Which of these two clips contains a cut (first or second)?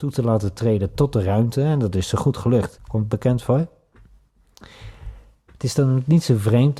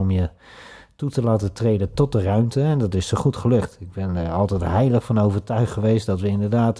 first